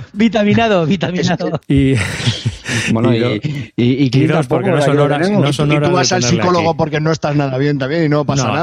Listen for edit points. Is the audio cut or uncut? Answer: cut